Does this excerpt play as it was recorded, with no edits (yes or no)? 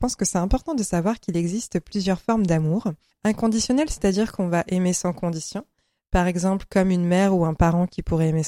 no